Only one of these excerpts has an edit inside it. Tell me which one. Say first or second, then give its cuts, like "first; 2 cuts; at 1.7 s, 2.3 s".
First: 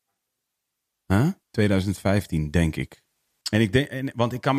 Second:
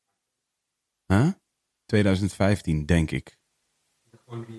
first; 2 cuts; at 1.4 s, 3.4 s